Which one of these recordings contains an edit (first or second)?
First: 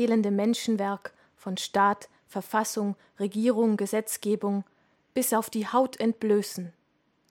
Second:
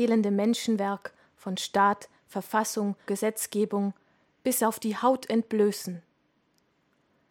second